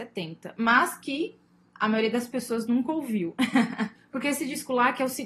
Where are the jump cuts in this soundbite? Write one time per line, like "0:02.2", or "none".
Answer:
0:04.0